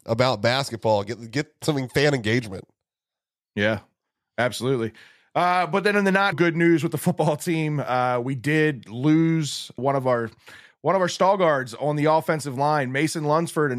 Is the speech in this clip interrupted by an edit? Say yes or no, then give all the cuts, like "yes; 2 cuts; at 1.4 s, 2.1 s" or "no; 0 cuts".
yes; 2 cuts; at 6.3 s, 9.8 s